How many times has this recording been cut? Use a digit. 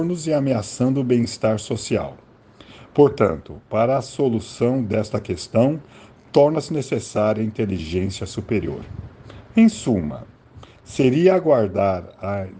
0